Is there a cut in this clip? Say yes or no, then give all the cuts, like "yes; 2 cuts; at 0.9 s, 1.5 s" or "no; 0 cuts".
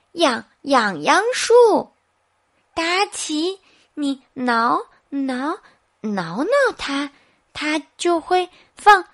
no; 0 cuts